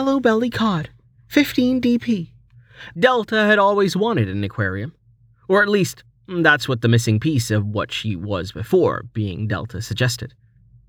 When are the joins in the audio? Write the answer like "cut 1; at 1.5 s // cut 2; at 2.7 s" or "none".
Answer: cut 1; at 2.9 s